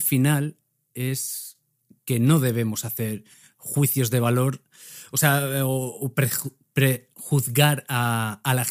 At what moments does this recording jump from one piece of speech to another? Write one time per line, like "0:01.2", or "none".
none

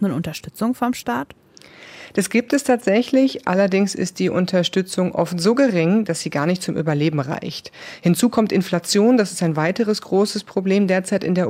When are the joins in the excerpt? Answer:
none

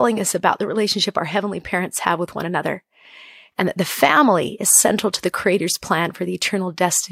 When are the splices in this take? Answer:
none

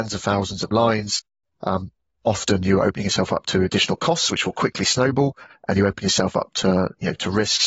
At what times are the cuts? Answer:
none

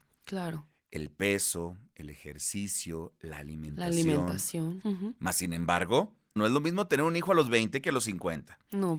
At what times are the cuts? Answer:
0:04.8
0:06.4

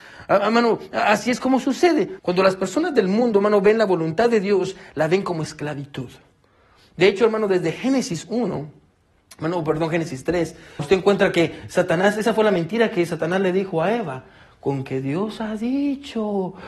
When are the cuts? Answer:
0:02.2
0:10.8

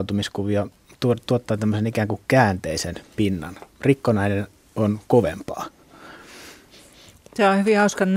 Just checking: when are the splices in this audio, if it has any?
none

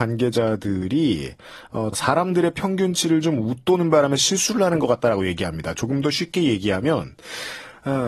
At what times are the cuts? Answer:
0:01.9

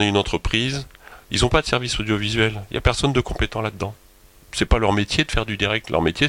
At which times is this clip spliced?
none

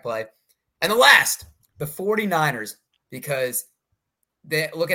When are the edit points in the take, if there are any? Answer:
0:02.9

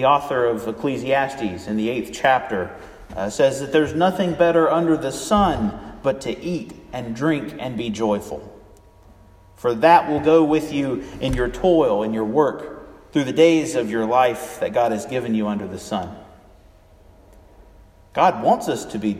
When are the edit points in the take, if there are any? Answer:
none

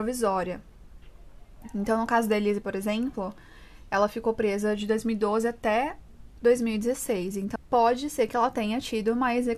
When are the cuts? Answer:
0:07.6

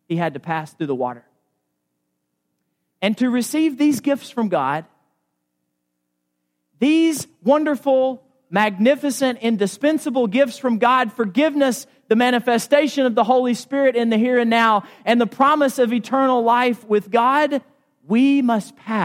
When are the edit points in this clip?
none

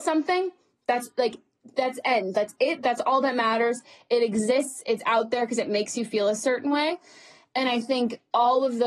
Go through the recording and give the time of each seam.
none

